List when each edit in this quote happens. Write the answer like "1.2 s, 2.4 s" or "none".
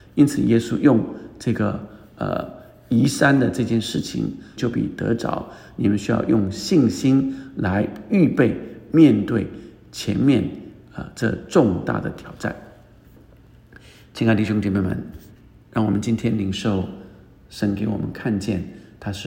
4.6 s

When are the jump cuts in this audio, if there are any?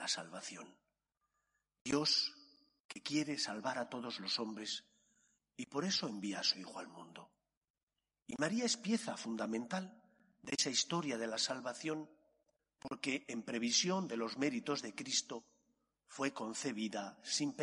none

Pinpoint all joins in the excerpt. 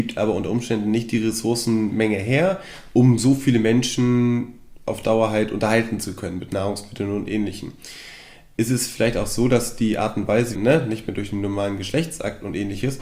10.5 s

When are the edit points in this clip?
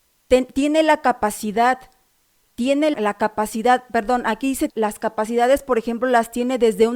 2.9 s, 4.7 s

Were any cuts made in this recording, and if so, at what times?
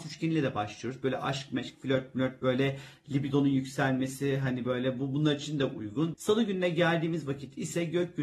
6.1 s

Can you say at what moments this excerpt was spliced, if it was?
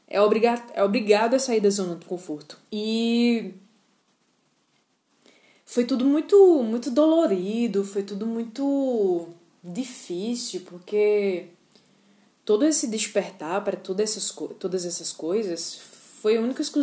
2.7 s

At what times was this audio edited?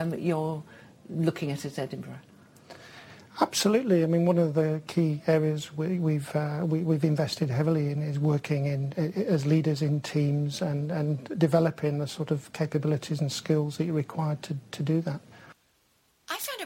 none

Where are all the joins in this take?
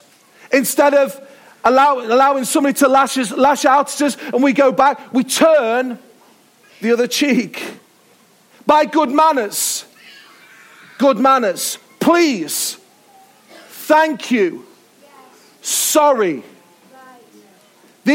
none

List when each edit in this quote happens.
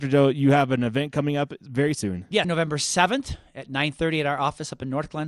2.4 s

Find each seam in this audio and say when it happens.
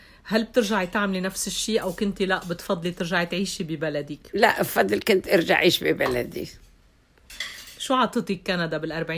none

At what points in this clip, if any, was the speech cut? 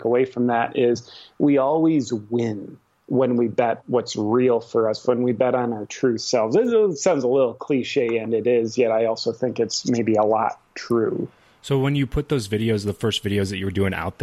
none

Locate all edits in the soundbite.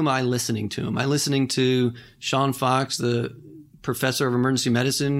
none

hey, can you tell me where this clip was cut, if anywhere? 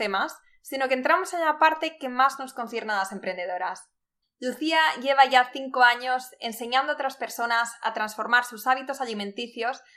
4.2 s

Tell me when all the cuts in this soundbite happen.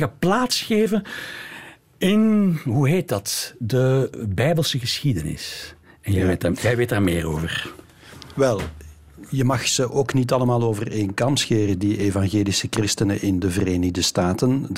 none

